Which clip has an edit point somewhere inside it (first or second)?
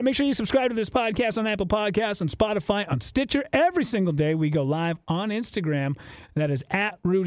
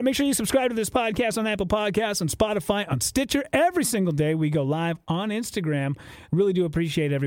second